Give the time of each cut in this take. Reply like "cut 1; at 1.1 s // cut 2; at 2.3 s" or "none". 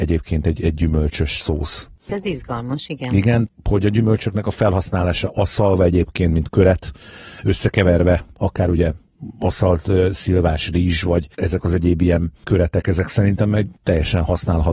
none

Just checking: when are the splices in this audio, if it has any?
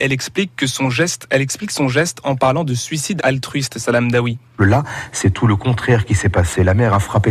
cut 1; at 3.2 s // cut 2; at 4.6 s

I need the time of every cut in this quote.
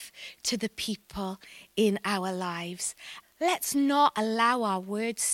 cut 1; at 3.2 s

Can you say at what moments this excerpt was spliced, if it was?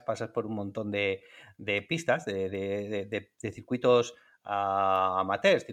none

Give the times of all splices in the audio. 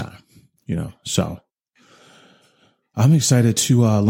none

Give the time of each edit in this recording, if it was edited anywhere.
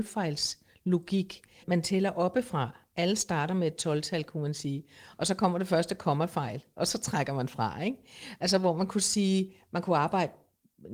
cut 1; at 1.6 s

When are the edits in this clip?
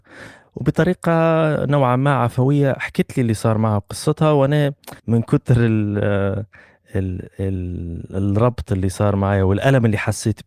cut 1; at 5.0 s

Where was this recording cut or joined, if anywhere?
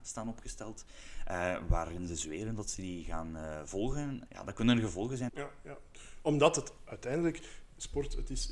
cut 1; at 4.3 s // cut 2; at 5.3 s

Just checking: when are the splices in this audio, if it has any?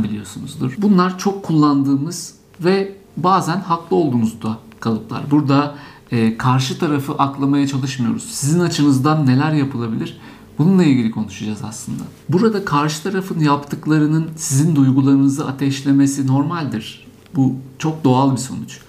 none

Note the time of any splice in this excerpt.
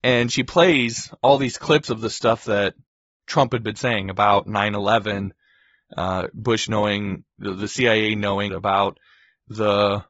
cut 1; at 8.5 s

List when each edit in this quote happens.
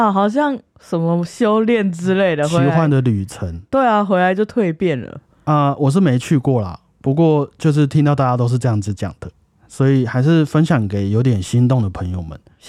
none

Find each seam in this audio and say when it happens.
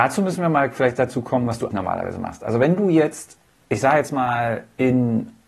cut 1; at 1.7 s

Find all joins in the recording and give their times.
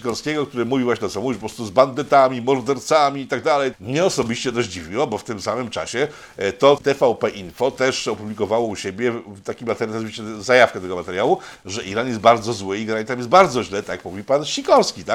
cut 1; at 3.7 s // cut 2; at 6.8 s

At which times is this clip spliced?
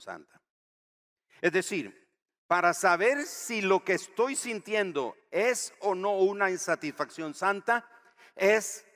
none

